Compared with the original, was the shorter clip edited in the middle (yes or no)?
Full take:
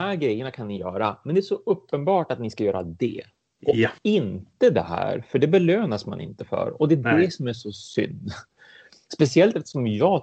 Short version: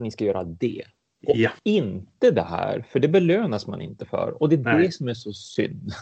no